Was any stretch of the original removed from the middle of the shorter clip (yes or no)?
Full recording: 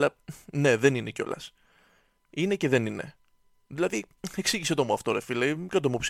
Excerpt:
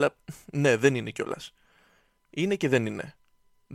no